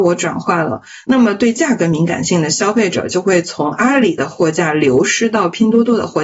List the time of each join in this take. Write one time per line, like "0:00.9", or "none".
0:01.1

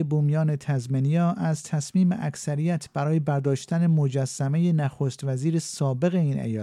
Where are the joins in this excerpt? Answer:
none

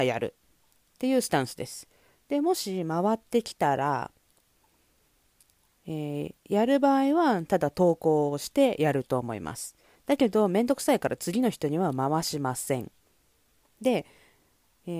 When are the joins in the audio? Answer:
none

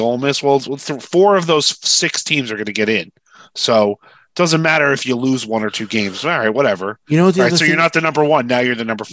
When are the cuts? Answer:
none

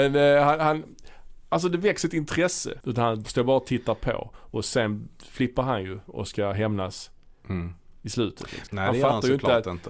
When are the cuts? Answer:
0:02.8
0:08.7

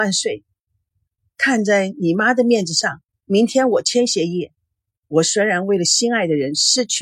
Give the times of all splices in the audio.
0:04.9

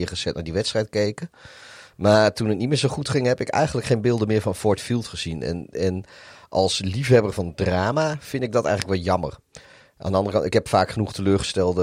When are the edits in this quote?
none

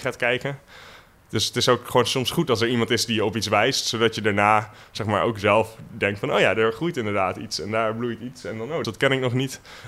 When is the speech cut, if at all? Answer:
0:08.8

